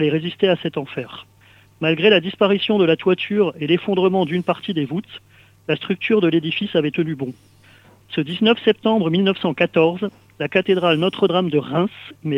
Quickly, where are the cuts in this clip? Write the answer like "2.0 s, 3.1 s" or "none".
none